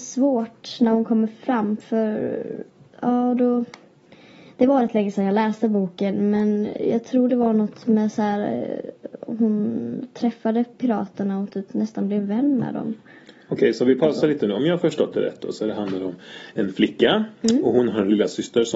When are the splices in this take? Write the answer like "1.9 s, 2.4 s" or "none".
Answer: none